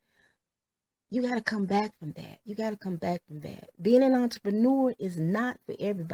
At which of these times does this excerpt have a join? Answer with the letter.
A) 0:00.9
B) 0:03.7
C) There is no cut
B